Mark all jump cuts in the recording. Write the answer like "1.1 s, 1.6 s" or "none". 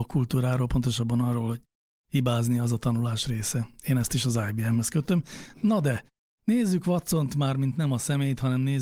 none